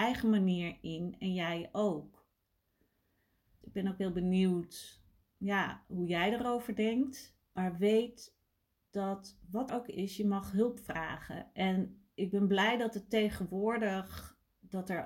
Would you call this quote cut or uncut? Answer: cut